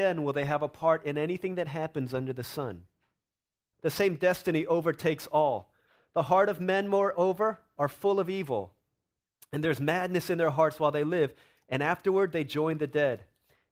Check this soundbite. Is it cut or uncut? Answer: cut